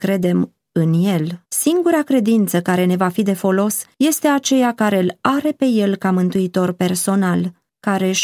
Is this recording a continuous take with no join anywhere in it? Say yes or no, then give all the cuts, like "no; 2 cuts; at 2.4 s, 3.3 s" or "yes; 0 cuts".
no; 1 cut; at 1.4 s